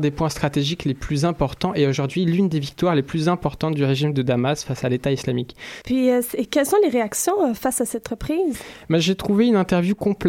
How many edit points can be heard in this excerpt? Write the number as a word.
one